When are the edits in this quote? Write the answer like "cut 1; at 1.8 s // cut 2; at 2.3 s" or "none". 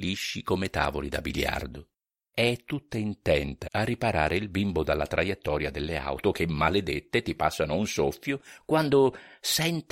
cut 1; at 2.2 s // cut 2; at 3.6 s